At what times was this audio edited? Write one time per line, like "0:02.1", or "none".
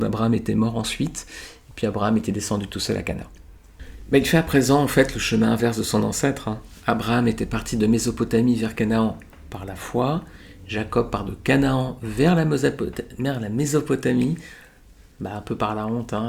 none